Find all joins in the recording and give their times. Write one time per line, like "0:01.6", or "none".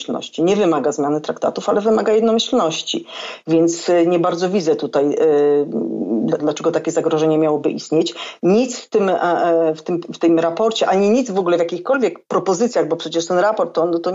0:06.4